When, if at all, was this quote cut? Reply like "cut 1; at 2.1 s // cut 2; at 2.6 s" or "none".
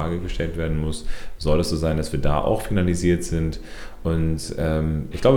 none